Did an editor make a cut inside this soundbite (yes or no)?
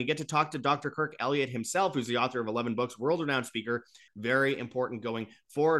yes